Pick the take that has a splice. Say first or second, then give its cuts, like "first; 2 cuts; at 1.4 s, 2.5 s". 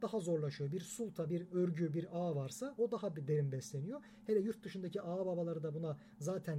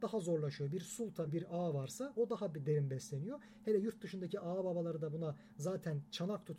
second; 1 cut; at 1.3 s